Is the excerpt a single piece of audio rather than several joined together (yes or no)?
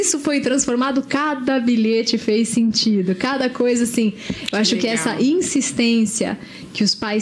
yes